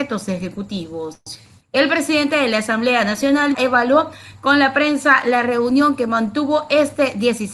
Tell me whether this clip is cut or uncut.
cut